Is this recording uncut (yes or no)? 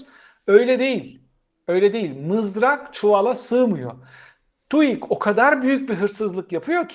yes